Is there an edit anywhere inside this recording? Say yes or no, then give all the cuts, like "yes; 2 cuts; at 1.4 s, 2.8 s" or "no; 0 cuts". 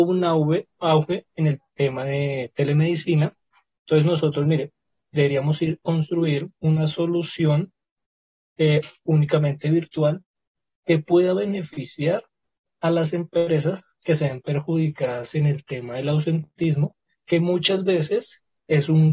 yes; 1 cut; at 9.0 s